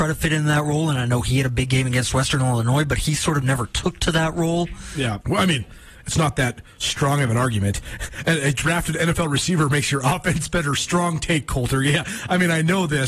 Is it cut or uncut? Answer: cut